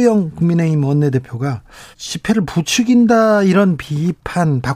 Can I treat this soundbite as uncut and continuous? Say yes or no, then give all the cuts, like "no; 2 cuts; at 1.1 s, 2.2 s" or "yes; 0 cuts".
no; 1 cut; at 1.9 s